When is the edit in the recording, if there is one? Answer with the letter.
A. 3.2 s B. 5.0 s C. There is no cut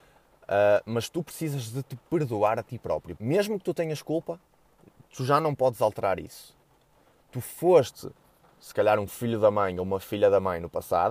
A